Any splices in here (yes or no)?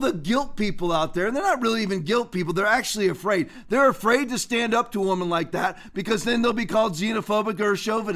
no